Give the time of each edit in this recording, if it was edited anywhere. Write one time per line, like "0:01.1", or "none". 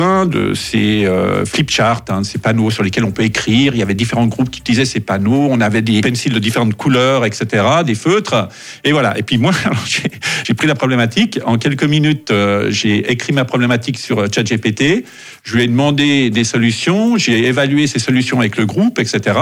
none

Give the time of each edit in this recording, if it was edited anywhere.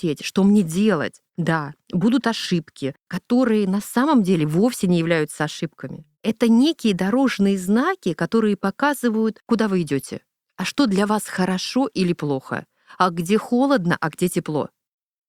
0:01.3
0:06.1

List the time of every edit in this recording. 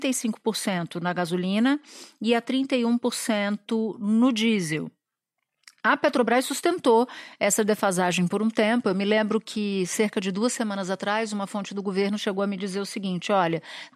none

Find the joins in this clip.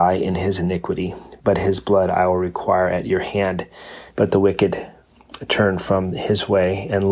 0:04.1

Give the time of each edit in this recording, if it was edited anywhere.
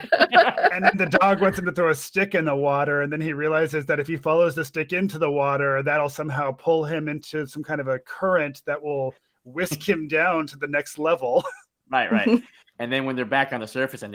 none

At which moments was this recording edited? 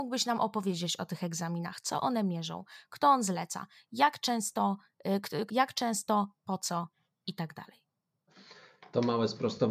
0:05.5

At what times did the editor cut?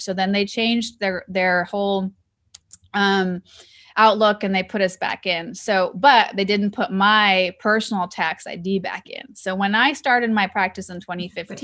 none

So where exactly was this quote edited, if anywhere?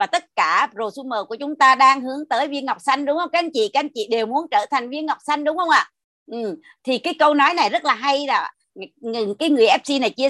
none

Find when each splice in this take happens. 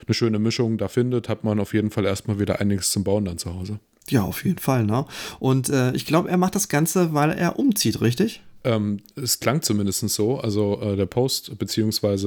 none

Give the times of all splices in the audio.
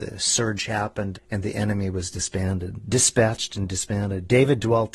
0:01.1

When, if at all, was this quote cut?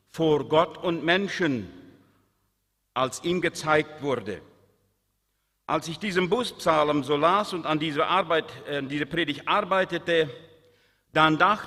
none

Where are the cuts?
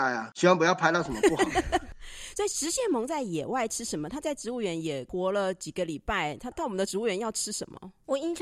0:06.5

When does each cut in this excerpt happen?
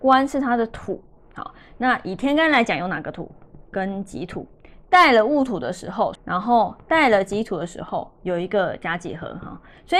0:03.7
0:06.2

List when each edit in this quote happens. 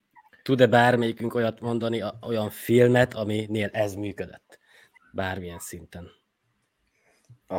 0:05.0

